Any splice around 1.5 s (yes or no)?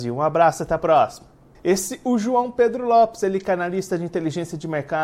yes